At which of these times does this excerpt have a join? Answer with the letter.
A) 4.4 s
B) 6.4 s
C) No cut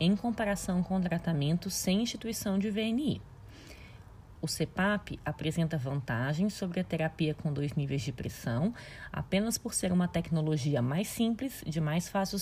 A